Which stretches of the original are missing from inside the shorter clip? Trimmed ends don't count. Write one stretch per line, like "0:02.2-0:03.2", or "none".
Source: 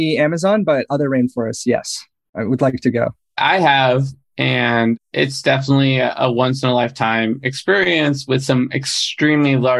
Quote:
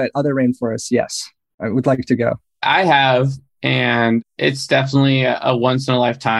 none